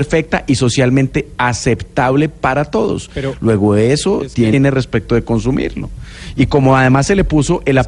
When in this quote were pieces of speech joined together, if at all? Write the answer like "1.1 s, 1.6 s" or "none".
4.5 s